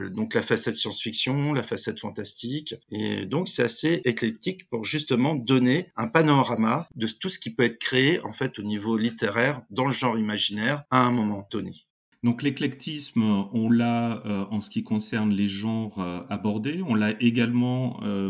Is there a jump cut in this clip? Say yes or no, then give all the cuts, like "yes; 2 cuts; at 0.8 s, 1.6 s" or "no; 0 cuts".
no; 0 cuts